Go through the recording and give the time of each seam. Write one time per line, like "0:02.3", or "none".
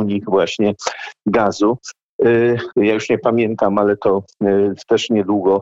0:02.7